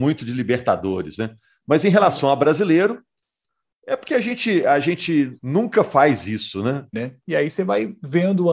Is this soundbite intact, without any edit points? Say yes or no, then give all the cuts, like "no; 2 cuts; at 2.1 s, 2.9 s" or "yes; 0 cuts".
no; 2 cuts; at 5.4 s, 6.9 s